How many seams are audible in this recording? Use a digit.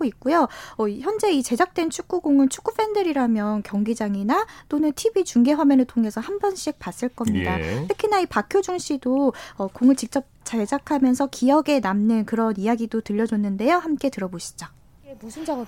0